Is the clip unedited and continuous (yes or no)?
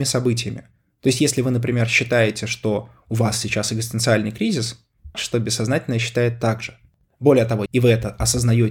no